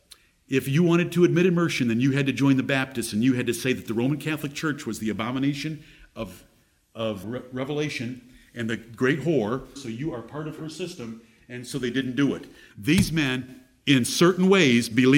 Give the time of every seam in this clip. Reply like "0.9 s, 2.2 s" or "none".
7.2 s, 9.8 s, 12.7 s